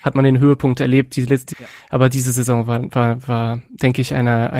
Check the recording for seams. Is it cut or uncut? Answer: cut